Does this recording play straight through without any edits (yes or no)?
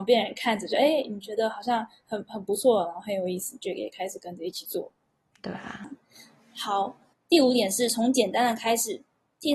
no